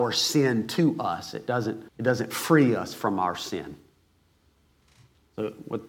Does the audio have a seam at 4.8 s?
no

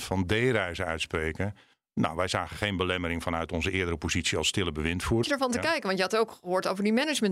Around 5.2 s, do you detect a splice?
yes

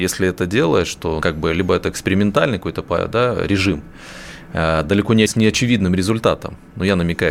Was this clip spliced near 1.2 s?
yes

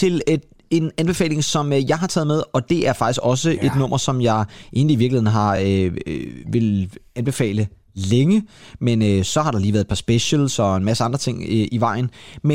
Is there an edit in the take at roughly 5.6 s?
no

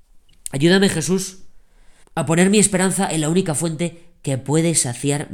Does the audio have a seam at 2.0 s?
yes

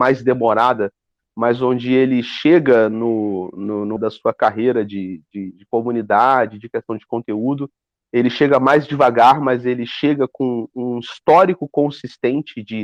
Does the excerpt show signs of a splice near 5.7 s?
no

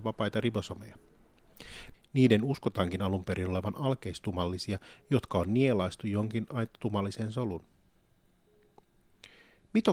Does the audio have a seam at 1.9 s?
yes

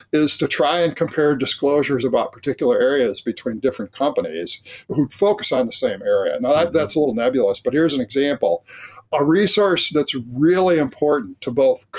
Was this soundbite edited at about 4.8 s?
yes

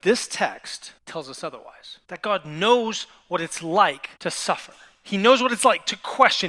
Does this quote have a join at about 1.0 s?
yes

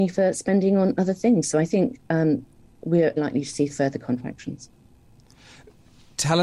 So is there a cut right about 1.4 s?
no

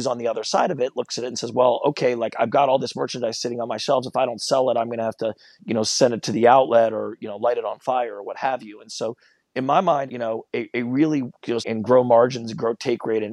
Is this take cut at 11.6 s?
yes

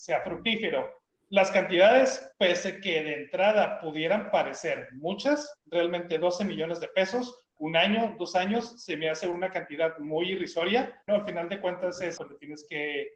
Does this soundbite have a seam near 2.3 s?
no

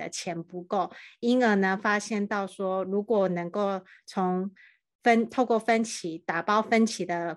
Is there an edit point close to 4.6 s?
no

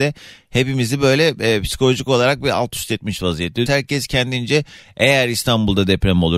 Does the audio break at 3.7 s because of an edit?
yes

